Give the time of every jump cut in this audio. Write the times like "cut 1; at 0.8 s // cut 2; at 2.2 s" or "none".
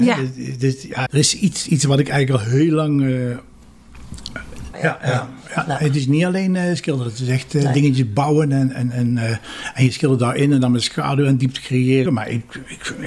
cut 1; at 1.1 s // cut 2; at 4.7 s // cut 3; at 12.1 s